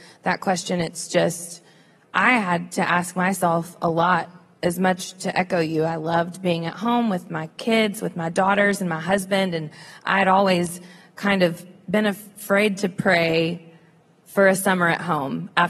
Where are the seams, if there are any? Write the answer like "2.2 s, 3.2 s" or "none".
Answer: none